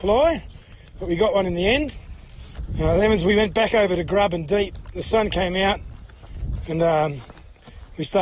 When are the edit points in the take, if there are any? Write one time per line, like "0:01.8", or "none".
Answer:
0:02.7